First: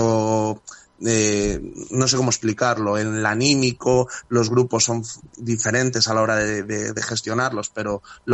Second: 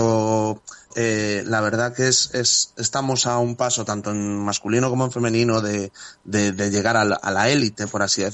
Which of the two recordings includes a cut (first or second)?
second